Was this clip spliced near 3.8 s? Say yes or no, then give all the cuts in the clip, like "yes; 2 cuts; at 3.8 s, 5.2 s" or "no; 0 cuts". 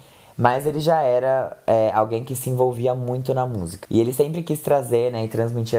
yes; 1 cut; at 3.8 s